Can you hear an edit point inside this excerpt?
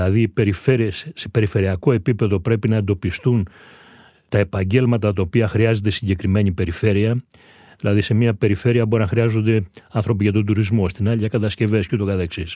yes; 1 cut; at 10.9 s

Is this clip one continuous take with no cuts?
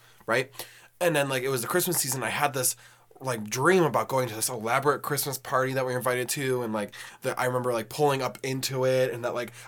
yes; 0 cuts

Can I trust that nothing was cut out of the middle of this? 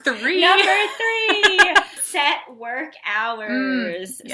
no; 1 cut; at 2.0 s

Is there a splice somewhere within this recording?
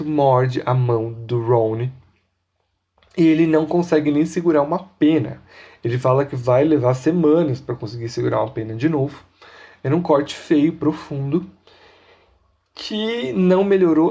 no; 0 cuts

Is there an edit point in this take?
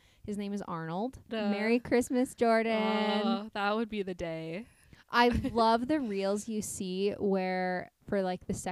yes; 1 cut; at 1.3 s

